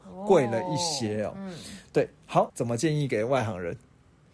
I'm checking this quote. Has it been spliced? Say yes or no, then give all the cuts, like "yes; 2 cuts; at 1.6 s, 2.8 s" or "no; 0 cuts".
yes; 1 cut; at 2.5 s